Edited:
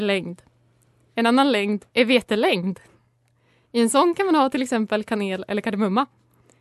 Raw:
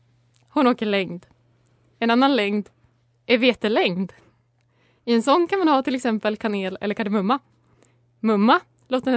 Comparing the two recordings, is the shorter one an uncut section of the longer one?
no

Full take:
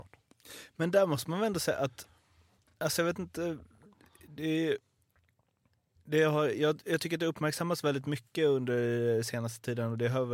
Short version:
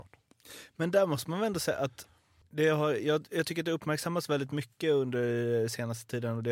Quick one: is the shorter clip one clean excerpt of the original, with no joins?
no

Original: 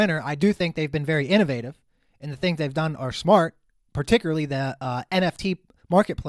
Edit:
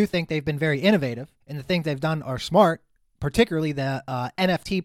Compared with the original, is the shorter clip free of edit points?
no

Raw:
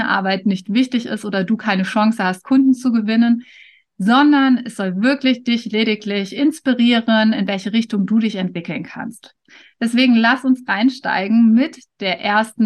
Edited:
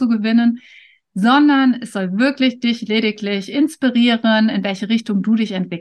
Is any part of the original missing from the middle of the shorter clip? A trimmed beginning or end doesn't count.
no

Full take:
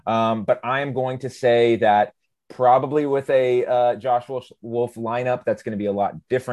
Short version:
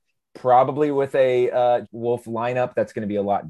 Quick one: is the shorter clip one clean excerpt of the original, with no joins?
no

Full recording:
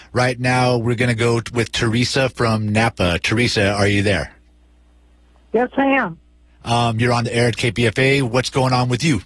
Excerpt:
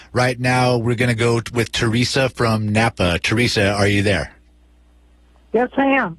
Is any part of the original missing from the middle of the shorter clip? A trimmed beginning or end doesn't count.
no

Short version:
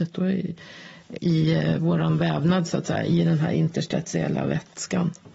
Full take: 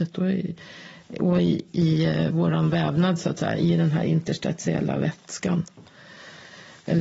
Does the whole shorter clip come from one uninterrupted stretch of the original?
no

